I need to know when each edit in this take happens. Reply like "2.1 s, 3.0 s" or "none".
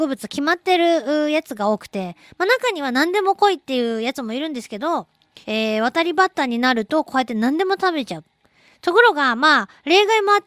5.4 s